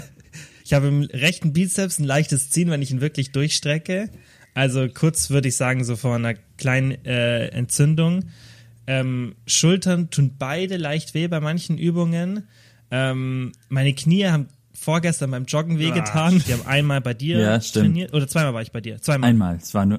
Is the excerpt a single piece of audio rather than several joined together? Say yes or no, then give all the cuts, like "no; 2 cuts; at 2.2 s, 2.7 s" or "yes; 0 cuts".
no; 1 cut; at 16.4 s